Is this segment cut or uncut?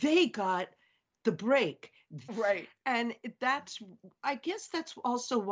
cut